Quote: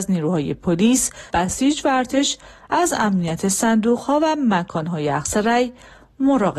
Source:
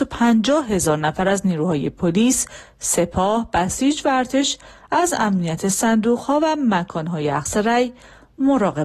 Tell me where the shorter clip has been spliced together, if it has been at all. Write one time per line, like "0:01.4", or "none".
0:01.3

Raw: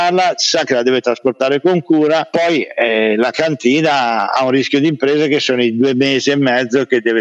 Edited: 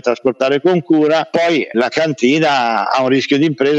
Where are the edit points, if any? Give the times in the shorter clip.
0:01.7

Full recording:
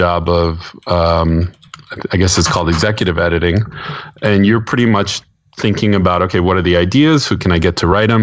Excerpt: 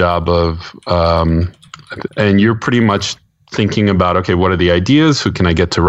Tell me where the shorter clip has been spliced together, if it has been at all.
0:02.1

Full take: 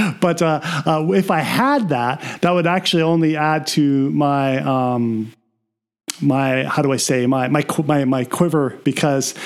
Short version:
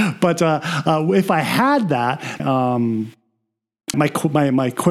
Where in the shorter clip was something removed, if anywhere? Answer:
0:02.4
0:03.9

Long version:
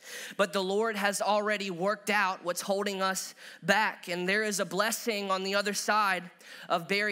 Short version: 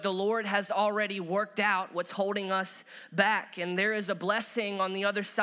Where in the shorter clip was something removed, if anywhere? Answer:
none

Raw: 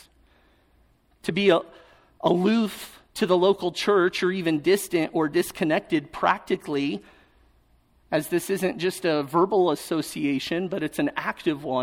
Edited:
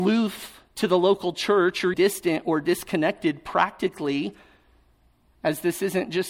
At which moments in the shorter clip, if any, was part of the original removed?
0:01.9

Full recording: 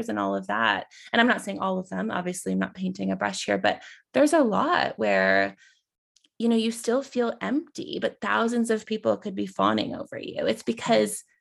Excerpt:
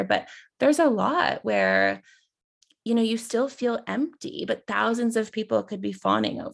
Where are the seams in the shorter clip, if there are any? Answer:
none

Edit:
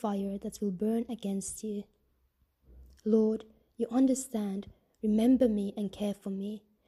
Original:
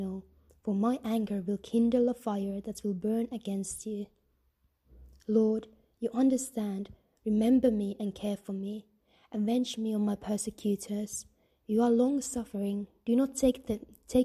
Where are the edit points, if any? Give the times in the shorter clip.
none

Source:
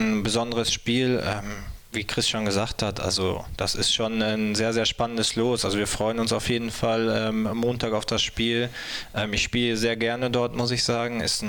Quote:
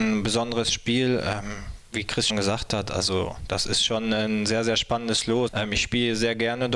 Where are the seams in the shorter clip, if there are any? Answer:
0:02.3
0:05.5

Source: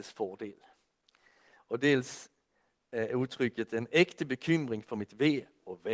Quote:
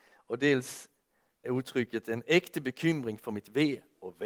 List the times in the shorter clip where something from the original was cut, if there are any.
0:01.4

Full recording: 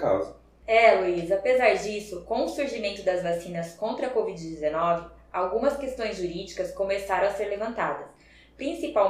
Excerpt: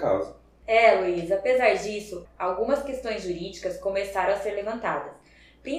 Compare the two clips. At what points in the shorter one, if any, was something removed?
0:02.3

